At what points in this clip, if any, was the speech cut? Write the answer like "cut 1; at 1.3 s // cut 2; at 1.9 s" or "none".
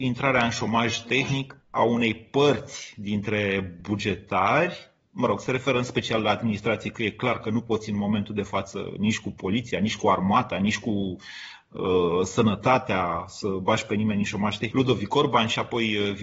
cut 1; at 1.6 s // cut 2; at 14.7 s